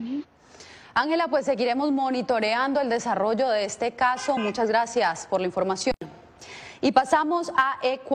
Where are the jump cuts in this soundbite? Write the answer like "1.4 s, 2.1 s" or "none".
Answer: none